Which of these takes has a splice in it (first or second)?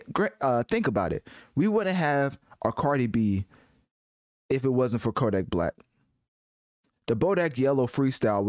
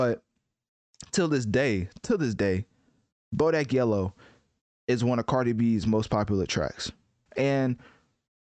second